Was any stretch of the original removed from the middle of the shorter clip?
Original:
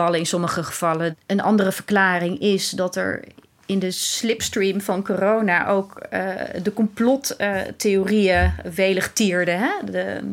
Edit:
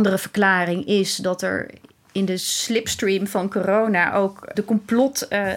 yes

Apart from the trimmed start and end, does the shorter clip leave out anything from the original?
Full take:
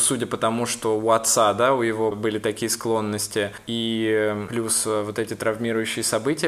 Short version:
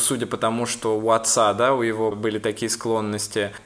no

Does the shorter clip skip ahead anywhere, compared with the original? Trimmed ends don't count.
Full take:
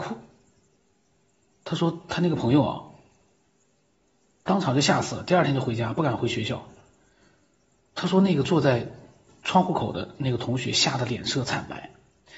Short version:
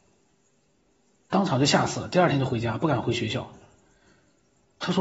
no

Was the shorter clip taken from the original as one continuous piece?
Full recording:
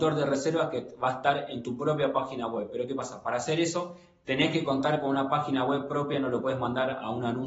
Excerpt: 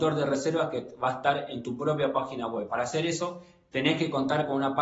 no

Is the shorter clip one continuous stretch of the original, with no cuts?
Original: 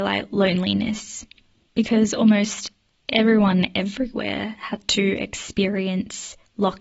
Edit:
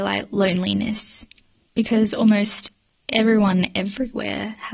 yes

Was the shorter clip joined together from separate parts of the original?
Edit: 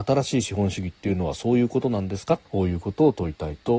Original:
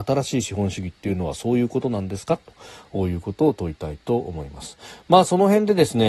yes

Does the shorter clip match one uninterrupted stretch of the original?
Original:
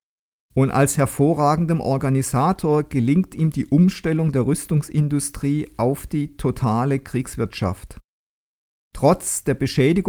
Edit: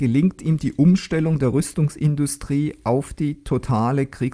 yes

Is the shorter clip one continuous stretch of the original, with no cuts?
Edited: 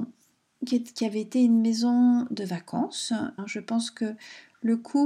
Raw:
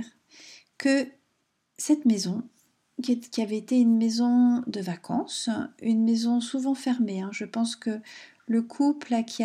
no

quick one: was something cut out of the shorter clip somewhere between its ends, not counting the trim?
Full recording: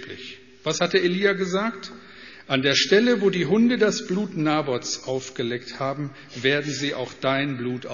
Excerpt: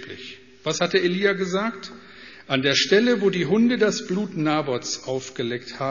no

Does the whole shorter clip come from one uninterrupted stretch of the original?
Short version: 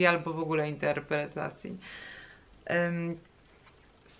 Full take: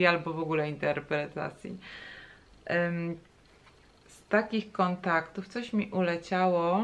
yes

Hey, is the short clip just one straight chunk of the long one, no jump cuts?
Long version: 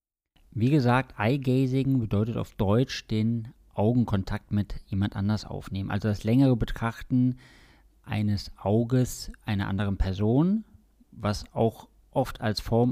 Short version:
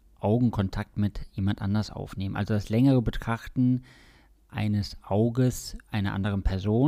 yes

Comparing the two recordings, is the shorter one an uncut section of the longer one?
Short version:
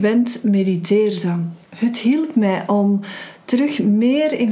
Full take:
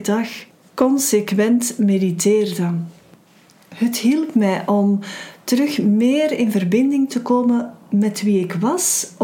no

